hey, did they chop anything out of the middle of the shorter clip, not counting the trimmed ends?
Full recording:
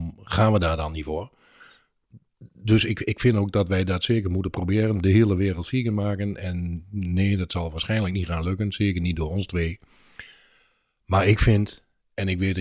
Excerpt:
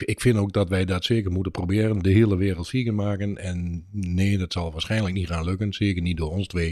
no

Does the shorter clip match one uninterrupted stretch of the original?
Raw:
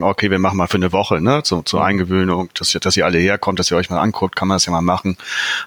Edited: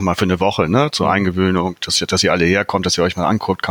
no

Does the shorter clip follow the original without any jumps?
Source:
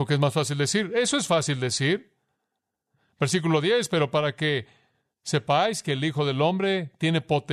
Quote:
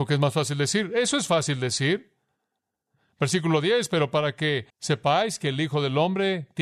no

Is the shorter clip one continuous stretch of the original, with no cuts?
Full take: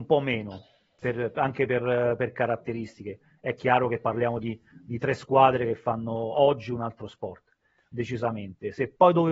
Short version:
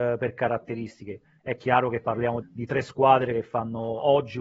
no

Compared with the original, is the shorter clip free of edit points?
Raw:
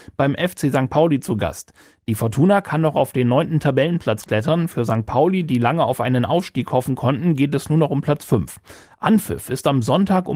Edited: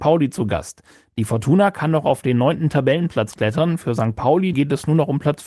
no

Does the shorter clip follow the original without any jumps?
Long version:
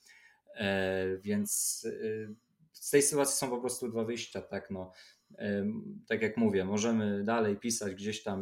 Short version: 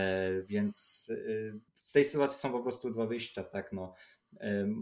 no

